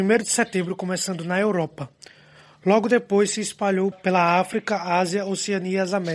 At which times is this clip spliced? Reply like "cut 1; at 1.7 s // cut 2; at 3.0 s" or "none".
cut 1; at 3.9 s

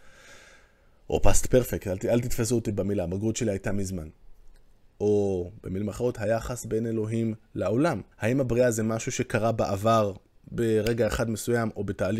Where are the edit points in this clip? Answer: cut 1; at 4.9 s // cut 2; at 8.1 s

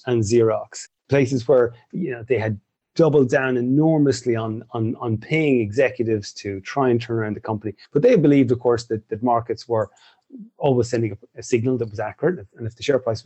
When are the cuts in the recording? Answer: cut 1; at 7.8 s

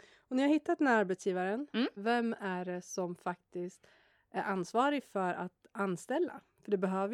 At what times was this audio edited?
cut 1; at 2.0 s

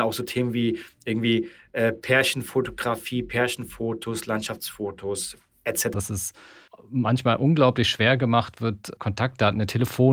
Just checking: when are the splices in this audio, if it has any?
cut 1; at 5.9 s // cut 2; at 9.0 s

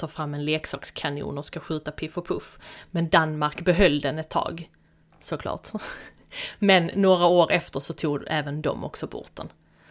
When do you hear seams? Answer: none

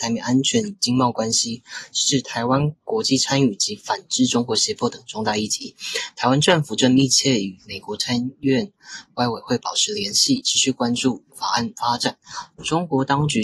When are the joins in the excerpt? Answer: cut 1; at 2.8 s // cut 2; at 12.5 s

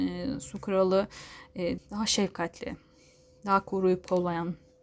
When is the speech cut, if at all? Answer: cut 1; at 1.8 s

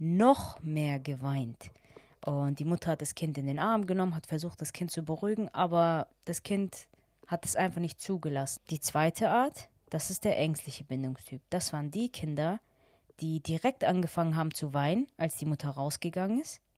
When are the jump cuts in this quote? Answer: cut 1; at 8.6 s

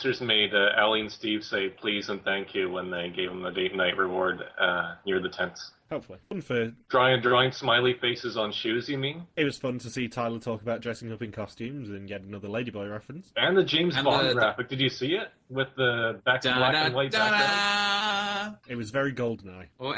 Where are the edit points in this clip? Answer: cut 1; at 6.2 s

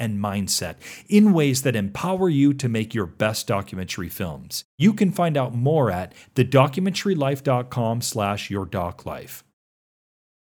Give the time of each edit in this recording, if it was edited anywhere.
none

